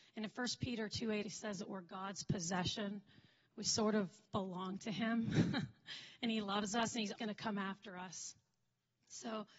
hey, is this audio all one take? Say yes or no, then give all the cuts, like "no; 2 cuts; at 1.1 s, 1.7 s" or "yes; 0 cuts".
no; 3 cuts; at 1.2 s, 4.3 s, 7.2 s